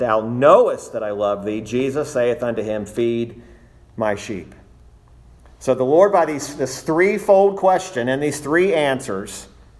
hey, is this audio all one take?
yes; 0 cuts

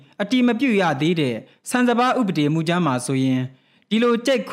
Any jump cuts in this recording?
no; 0 cuts

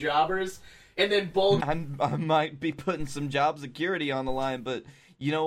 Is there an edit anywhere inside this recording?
yes; 1 cut; at 1.6 s

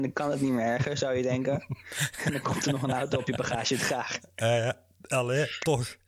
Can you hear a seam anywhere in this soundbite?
no; 0 cuts

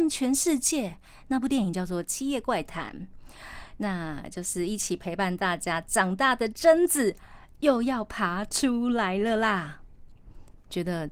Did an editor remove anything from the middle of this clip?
no; 0 cuts

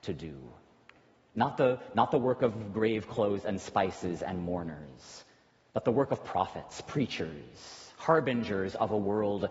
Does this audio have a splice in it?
no; 0 cuts

